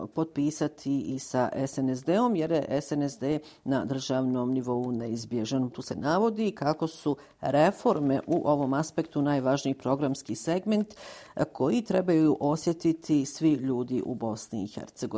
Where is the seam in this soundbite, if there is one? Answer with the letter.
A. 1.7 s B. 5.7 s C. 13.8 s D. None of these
B